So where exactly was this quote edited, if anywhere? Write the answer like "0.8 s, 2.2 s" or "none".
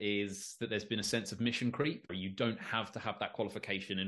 2.1 s